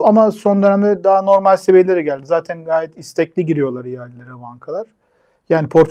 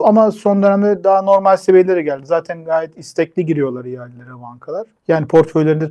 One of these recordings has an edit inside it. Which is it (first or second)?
second